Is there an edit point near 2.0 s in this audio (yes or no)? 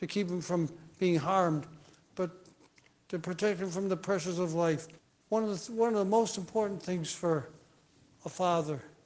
yes